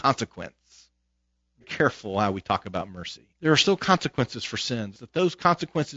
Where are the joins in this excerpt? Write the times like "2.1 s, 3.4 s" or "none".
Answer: 1.6 s, 3.3 s, 4.9 s